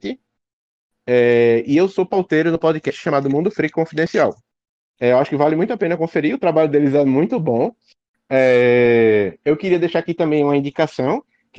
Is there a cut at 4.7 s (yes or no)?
no